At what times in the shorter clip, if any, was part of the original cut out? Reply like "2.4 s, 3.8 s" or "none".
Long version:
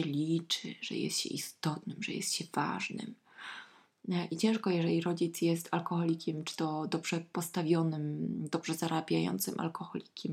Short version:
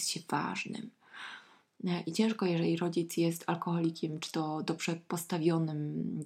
none